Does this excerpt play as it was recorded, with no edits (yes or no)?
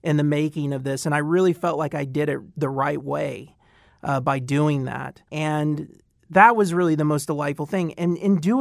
no